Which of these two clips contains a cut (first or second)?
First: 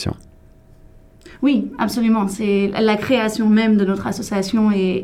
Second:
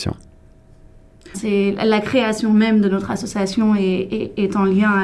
second